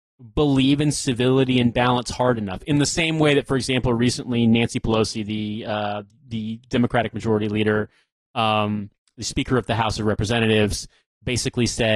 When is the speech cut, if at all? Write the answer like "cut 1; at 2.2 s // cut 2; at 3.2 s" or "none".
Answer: none